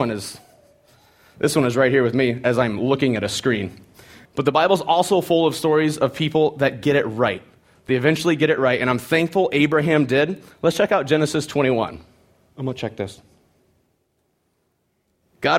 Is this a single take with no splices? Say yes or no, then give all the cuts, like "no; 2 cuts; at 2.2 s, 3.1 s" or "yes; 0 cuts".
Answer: no; 2 cuts; at 4.3 s, 12.5 s